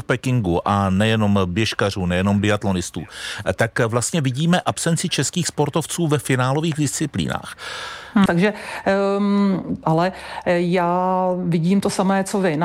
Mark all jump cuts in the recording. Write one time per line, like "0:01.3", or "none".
0:08.3
0:09.8